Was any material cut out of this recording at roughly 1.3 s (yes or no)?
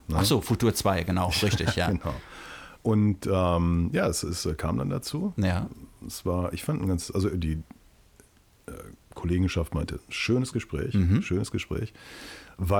no